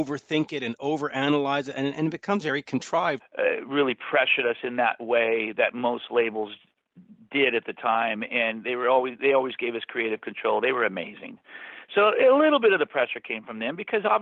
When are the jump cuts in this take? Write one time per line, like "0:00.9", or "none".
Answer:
0:03.2